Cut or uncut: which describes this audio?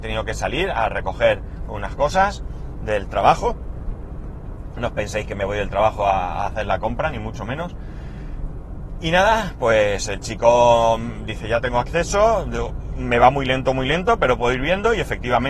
uncut